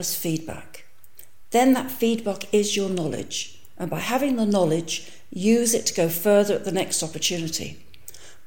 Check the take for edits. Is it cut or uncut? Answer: uncut